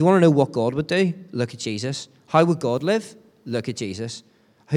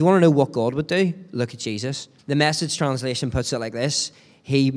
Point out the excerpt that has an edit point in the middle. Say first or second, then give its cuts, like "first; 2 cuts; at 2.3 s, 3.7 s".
second; 1 cut; at 2.2 s